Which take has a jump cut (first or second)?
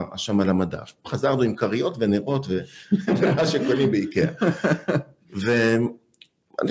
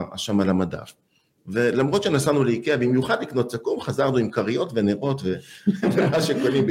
first